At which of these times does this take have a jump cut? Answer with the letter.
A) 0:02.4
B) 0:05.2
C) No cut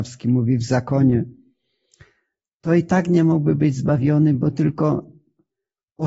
C